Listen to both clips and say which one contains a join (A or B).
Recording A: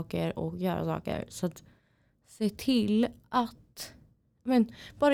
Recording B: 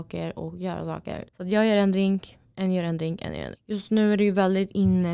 B